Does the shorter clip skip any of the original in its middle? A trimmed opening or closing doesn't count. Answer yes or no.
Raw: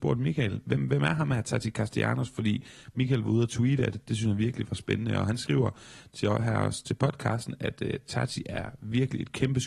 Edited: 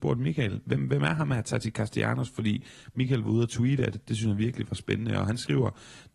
no